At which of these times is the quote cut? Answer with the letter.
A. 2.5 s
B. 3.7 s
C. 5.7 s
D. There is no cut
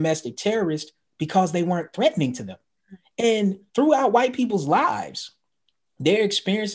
B